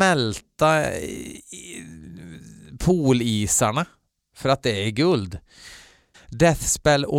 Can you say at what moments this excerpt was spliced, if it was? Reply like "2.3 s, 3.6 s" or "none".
6.1 s